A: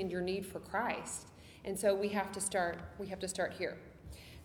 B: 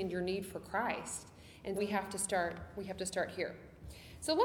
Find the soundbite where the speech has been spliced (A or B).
B